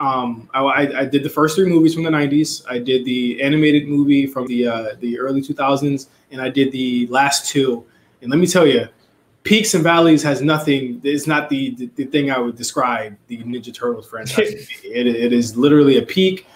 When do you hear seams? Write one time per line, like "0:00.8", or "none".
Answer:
0:04.5